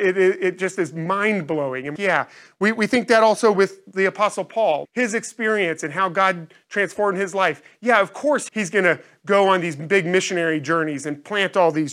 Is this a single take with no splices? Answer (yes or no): no